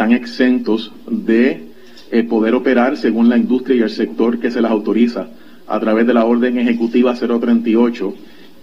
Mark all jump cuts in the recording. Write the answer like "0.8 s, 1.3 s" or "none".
none